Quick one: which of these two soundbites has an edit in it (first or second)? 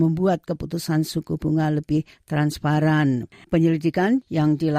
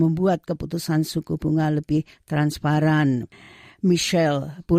first